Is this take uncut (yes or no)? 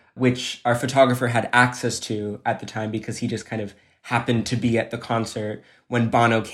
yes